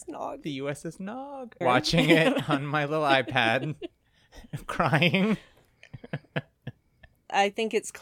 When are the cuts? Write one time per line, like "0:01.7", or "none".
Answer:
0:01.6